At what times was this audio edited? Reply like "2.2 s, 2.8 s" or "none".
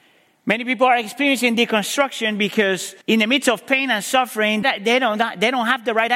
3.0 s, 4.6 s